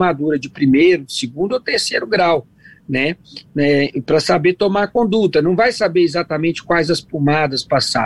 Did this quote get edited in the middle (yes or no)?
no